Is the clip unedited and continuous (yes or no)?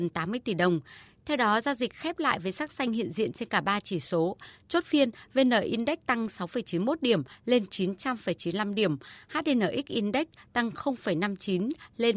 yes